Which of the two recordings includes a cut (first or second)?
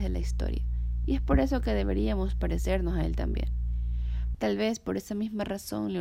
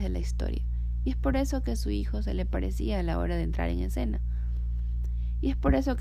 first